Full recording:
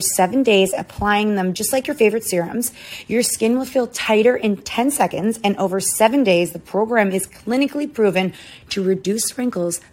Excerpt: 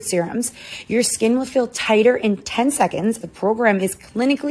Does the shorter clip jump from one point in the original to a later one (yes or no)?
yes